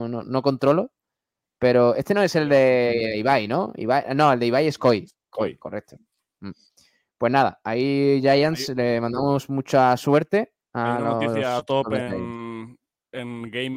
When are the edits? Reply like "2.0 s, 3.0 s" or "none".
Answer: none